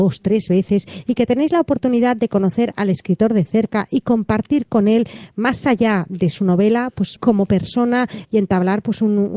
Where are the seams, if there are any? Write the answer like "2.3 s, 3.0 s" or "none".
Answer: 7.2 s, 8.2 s